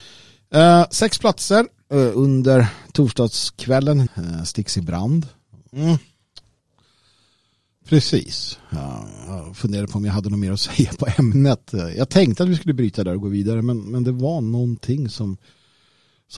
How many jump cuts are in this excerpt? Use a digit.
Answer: 2